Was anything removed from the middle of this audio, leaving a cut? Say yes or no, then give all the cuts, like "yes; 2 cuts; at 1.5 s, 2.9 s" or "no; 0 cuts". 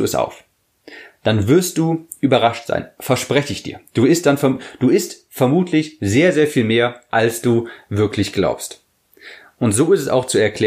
no; 0 cuts